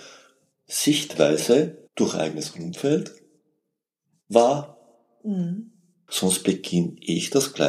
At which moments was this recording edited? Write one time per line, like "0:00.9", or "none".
0:01.9
0:06.1